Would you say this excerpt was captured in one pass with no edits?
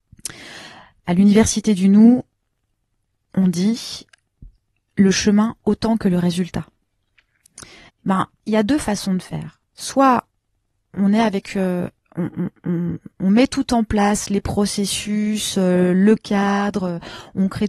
no; 1 cut; at 7.9 s

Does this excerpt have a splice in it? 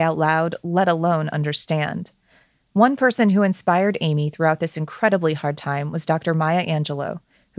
no; 0 cuts

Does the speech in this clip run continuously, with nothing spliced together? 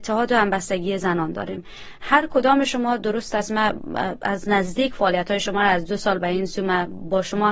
yes; 0 cuts

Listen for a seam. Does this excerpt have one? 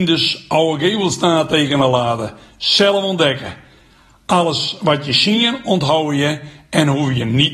no; 0 cuts

